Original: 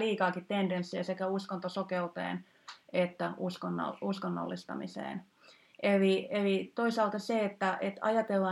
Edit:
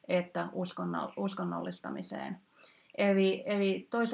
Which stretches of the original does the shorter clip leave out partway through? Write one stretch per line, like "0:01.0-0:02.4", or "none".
none